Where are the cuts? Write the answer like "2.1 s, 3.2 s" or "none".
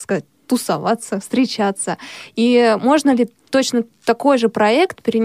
none